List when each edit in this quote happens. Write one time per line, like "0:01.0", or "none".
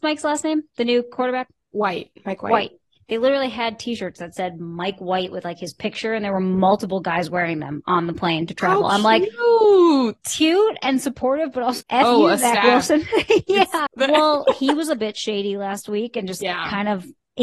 0:11.8
0:13.9
0:16.4